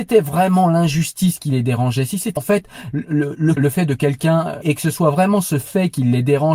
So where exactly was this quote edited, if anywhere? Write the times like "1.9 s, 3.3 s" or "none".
2.4 s, 3.6 s, 4.6 s